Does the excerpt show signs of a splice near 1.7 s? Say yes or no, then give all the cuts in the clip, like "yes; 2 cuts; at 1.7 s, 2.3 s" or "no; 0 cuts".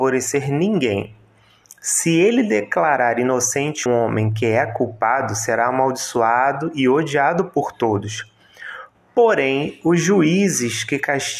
no; 1 cut; at 3.9 s